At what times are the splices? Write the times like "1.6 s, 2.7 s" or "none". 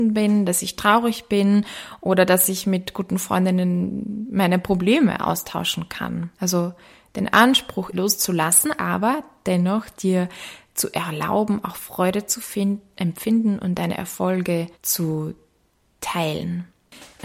6.3 s, 7.9 s, 14.7 s